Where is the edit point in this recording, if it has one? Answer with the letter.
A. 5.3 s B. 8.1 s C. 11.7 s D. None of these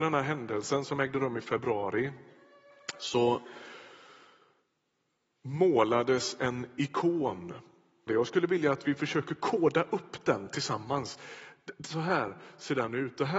B